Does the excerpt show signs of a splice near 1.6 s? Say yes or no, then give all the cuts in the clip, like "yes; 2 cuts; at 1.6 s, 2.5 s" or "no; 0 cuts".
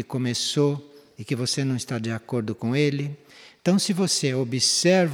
no; 1 cut; at 3.6 s